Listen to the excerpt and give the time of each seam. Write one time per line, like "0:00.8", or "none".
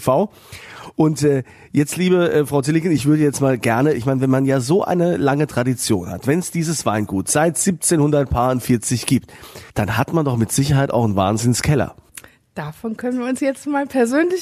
0:09.7